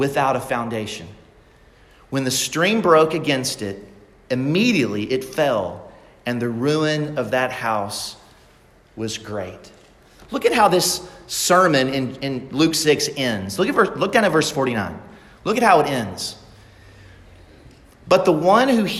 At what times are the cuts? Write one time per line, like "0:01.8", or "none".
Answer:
0:10.2